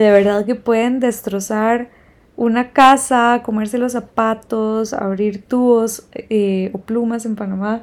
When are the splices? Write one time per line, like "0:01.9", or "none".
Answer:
none